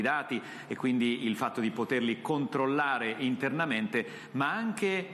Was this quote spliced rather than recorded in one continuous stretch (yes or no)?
no